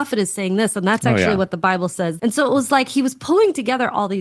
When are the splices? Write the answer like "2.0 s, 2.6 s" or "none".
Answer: 2.2 s